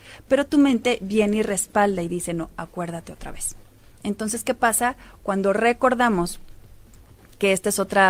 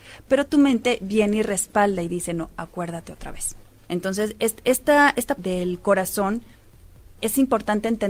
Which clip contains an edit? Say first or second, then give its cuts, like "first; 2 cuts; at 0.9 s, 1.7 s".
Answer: second; 2 cuts; at 3.8 s, 5.4 s